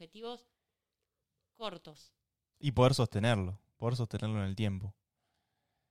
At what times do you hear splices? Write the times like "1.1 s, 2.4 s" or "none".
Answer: 2.5 s